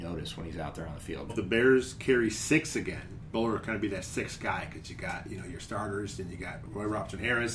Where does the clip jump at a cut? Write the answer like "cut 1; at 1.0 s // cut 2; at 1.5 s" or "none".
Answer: cut 1; at 1.3 s // cut 2; at 3.3 s // cut 3; at 6.7 s